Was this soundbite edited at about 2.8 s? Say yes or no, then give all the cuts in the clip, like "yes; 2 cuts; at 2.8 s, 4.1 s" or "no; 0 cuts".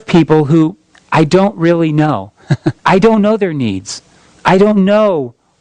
yes; 1 cut; at 2.8 s